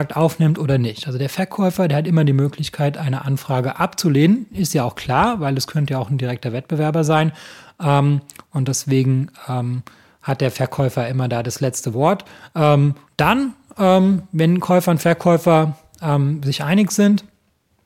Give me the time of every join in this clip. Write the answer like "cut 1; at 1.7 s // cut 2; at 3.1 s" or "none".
cut 1; at 13.1 s